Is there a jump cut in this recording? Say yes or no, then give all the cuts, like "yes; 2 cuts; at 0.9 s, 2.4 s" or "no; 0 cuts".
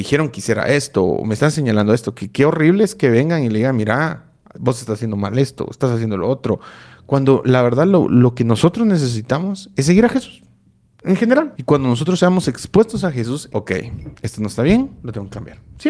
yes; 2 cuts; at 11.5 s, 13.5 s